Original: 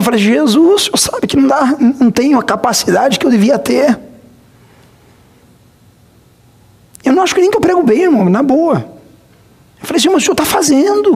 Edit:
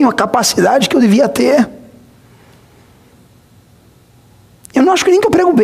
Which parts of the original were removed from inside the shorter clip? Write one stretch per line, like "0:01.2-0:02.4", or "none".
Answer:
none